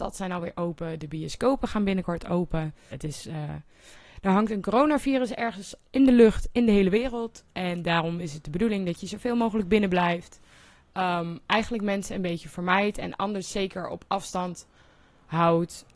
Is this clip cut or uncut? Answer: cut